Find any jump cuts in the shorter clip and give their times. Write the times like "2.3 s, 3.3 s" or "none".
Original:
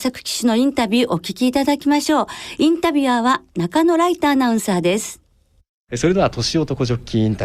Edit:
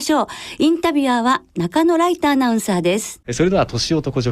3.2 s